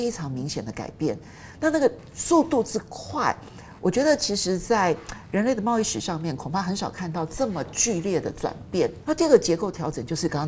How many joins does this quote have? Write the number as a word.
one